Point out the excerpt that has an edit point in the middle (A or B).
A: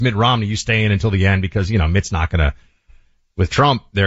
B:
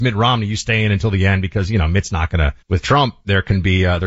B